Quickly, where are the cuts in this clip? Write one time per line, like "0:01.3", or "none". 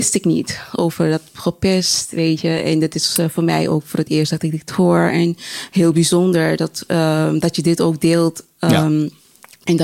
none